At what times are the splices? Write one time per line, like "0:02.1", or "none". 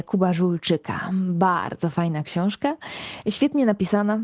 none